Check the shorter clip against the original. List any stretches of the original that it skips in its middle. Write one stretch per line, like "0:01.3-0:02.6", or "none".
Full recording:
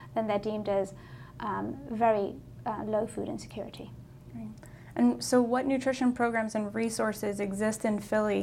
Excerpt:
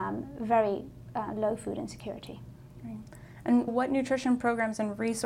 0:05.2-0:05.4